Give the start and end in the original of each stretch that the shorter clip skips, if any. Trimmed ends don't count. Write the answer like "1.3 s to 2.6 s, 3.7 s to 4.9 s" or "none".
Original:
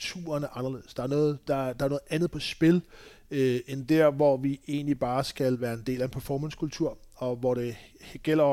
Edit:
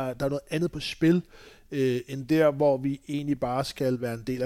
none